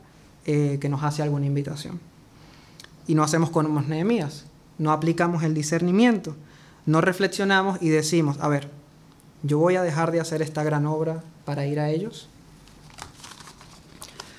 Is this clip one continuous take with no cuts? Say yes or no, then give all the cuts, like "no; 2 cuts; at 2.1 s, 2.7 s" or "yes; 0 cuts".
no; 1 cut; at 11.4 s